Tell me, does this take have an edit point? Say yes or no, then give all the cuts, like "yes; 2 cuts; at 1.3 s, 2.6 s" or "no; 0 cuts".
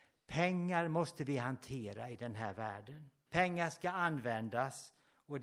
yes; 1 cut; at 3.3 s